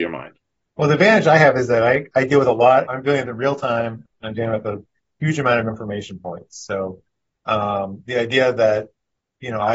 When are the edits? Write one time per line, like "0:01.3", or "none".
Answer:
0:02.9